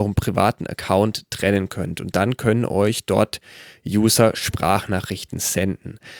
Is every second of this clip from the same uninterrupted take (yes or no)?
yes